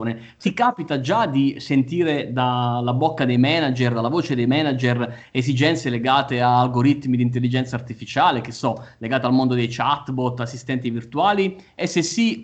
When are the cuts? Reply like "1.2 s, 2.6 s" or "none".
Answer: none

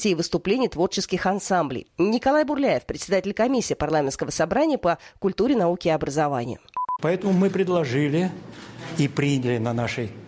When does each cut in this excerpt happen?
1.9 s, 7.0 s

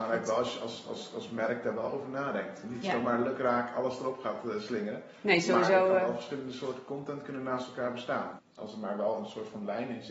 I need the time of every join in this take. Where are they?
8.4 s

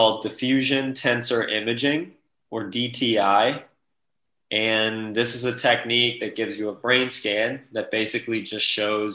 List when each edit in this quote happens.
none

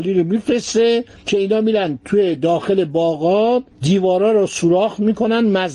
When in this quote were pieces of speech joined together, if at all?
3.7 s

